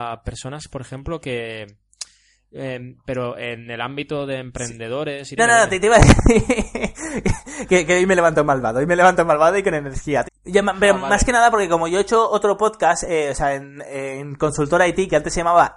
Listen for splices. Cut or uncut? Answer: cut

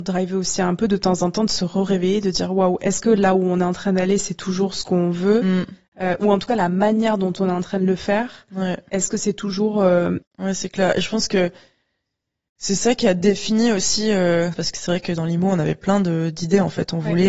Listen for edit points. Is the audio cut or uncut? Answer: cut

